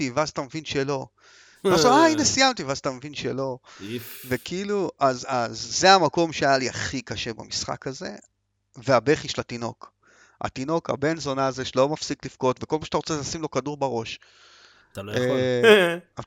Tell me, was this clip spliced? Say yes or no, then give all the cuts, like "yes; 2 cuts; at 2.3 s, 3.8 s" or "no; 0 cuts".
no; 0 cuts